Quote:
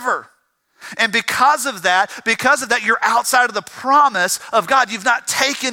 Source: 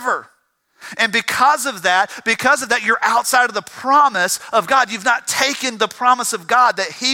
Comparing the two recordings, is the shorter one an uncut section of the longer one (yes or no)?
yes